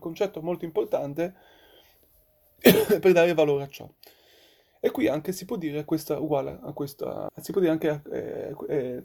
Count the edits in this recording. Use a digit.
1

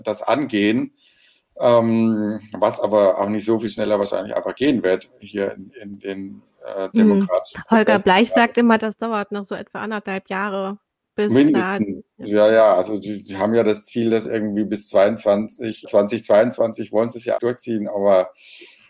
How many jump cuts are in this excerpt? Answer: 2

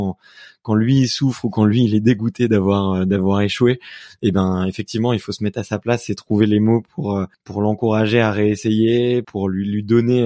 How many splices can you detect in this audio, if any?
2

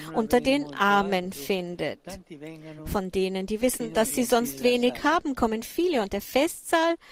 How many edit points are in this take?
0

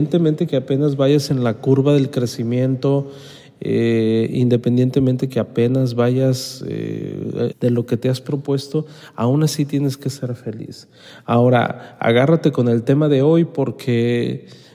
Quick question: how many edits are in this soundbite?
1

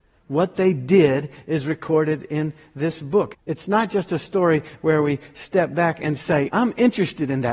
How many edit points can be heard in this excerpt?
2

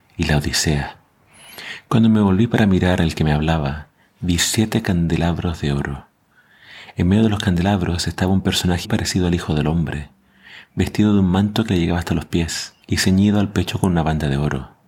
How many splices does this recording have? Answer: 2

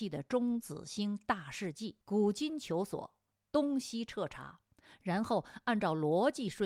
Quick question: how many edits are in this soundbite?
1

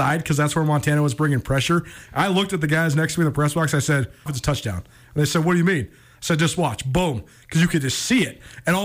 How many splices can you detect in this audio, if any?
1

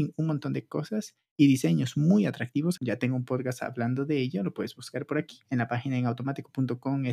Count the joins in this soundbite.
1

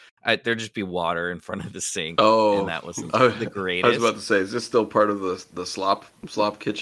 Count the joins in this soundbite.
0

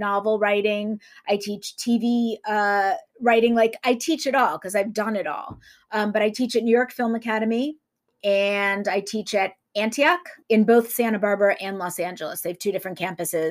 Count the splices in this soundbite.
2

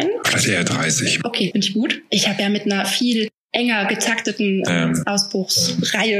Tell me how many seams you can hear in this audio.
1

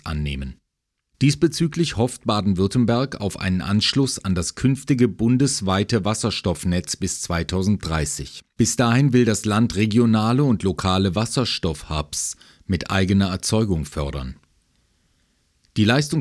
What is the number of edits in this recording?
2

